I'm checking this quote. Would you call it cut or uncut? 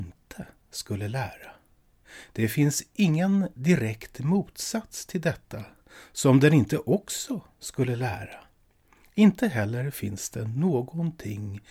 uncut